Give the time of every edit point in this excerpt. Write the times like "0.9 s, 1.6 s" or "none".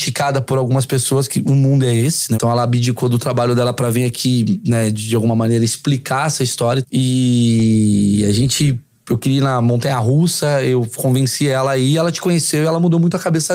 2.3 s, 6.8 s